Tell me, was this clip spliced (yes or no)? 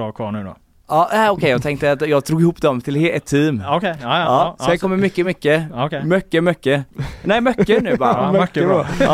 no